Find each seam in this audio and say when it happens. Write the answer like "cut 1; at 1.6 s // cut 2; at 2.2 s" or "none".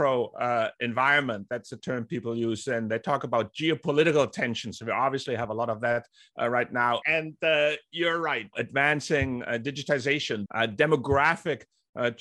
cut 1; at 7.0 s // cut 2; at 8.5 s // cut 3; at 10.5 s